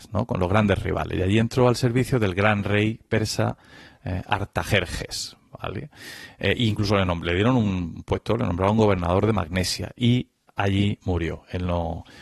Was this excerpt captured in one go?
yes; 0 cuts

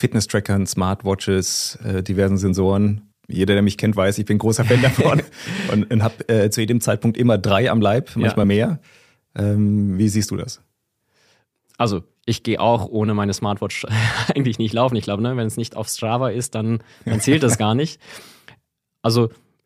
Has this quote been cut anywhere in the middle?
no; 0 cuts

